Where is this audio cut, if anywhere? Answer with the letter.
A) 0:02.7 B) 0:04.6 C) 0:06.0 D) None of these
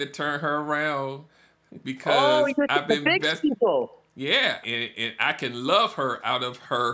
B